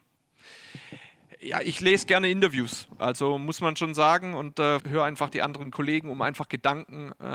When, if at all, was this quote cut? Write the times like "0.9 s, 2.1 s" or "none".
4.8 s